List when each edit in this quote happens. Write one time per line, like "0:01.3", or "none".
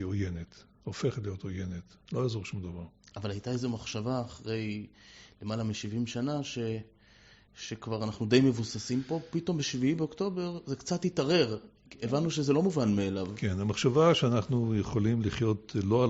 none